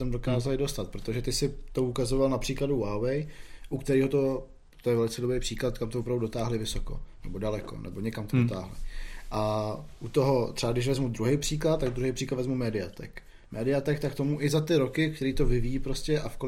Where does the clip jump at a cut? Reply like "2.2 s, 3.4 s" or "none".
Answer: none